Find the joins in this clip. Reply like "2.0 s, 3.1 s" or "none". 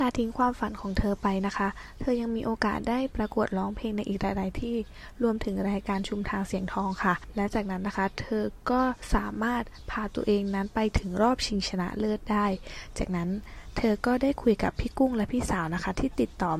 3.1 s